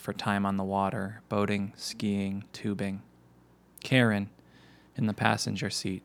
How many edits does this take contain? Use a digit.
1